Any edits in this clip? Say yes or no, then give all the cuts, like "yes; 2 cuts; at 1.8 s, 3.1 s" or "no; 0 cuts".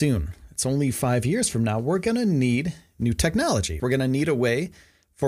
yes; 1 cut; at 3.8 s